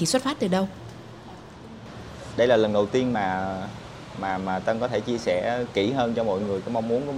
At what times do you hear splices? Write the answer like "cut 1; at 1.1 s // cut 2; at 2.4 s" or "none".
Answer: none